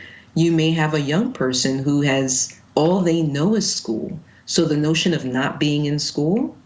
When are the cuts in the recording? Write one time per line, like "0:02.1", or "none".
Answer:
none